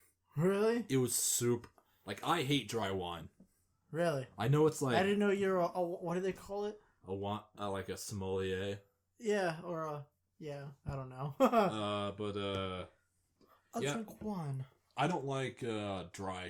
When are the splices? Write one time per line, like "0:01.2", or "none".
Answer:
none